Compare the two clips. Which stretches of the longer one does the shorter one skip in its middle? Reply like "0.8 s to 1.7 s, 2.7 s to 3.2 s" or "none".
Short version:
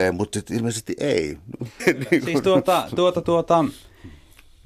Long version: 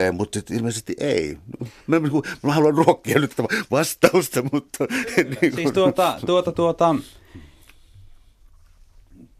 1.8 s to 5.1 s